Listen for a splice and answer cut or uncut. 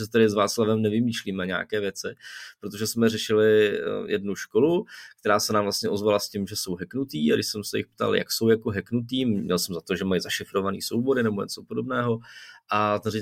uncut